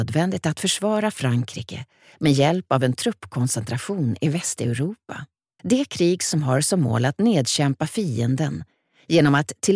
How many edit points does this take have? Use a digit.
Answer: 1